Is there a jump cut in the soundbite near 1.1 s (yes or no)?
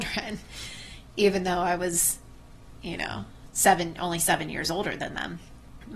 no